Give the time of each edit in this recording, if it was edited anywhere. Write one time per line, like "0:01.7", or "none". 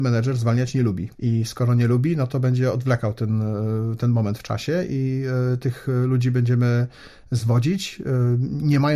0:01.1